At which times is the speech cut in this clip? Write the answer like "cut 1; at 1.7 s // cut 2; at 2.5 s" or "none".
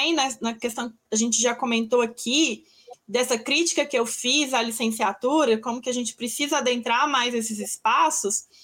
cut 1; at 1.1 s